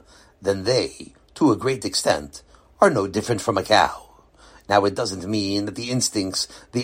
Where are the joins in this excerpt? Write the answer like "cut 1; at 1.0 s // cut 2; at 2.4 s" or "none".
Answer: none